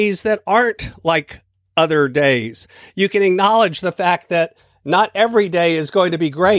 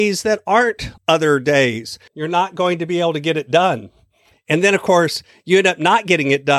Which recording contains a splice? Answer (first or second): second